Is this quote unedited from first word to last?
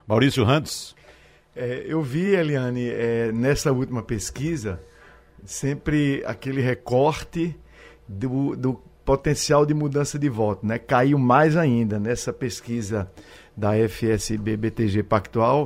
yes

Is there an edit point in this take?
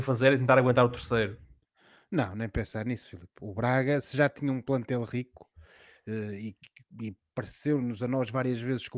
no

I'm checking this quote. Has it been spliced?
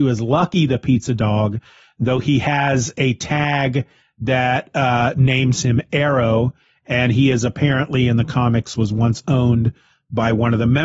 no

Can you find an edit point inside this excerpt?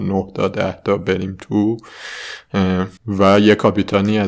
yes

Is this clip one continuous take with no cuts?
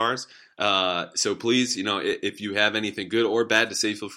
yes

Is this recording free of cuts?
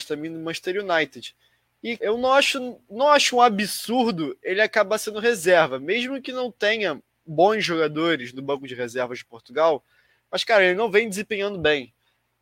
no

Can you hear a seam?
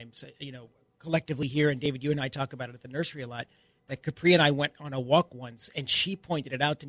no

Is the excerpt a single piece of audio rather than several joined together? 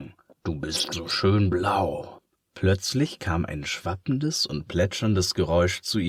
no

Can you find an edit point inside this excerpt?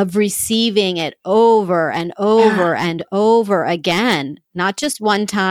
no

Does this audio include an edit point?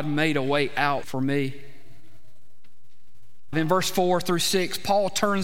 yes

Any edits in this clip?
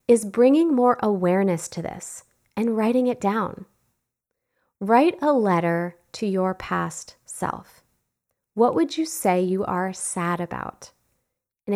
no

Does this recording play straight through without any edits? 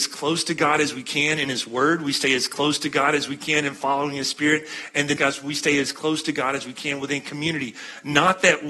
no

